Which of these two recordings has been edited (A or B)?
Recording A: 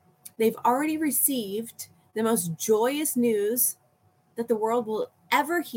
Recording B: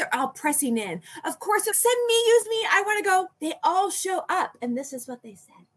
B